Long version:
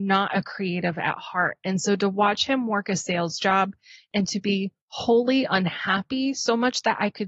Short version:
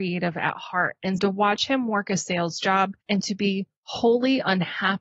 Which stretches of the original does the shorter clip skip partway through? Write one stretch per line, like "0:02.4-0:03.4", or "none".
0:01.8-0:02.0
0:03.8-0:04.1